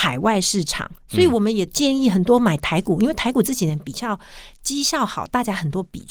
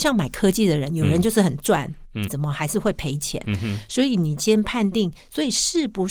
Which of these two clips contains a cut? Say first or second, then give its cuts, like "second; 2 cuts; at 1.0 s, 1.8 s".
second; 1 cut; at 2.3 s